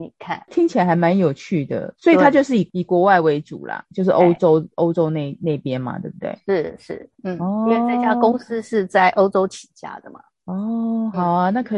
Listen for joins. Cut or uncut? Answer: uncut